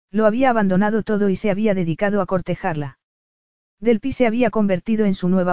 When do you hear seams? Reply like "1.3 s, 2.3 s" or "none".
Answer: none